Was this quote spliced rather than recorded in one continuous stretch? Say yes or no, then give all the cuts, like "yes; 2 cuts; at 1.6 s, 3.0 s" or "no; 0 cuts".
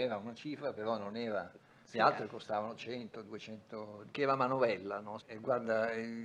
yes; 2 cuts; at 4.1 s, 5.2 s